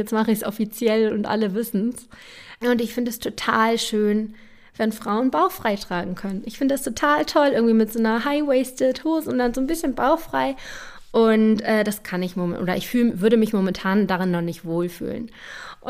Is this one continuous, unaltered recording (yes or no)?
no